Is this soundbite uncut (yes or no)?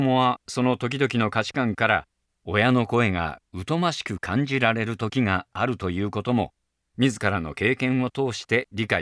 yes